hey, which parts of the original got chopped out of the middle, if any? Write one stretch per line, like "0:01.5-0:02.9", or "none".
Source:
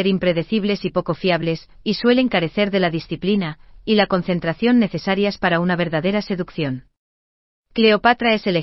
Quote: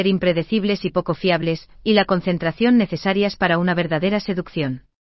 0:01.8-0:03.8